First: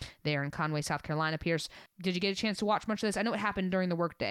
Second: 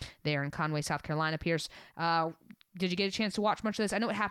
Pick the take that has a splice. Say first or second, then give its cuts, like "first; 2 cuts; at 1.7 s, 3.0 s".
first; 1 cut; at 1.9 s